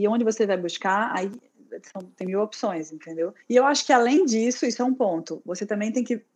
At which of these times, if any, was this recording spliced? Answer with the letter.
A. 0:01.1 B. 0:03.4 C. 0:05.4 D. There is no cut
B